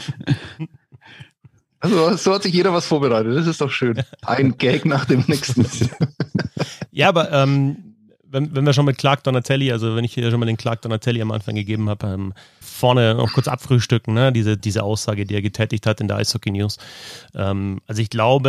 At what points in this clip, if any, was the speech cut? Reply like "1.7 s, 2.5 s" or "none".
12.6 s, 14.6 s